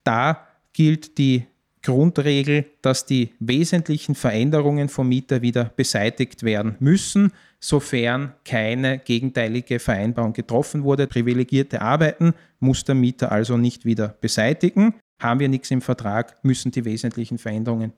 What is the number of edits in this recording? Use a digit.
2